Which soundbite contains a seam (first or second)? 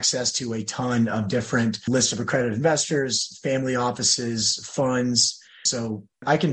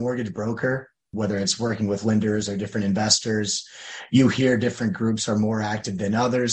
second